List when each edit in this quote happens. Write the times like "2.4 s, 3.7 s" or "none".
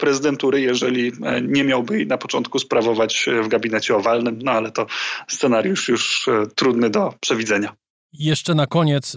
none